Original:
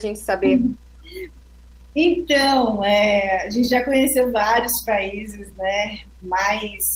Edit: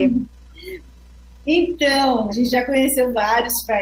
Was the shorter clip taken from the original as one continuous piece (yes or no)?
no